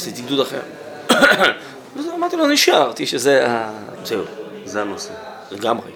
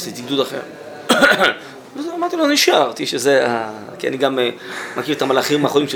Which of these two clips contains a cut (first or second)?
first